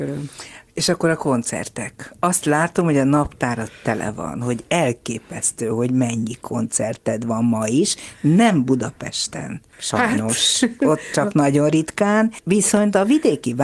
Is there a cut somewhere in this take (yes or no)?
no